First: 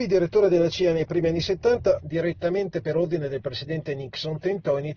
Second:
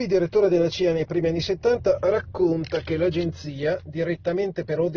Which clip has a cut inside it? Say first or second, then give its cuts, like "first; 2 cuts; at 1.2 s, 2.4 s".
first; 1 cut; at 2.0 s